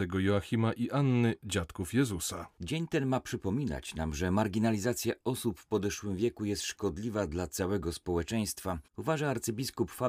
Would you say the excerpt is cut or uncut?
cut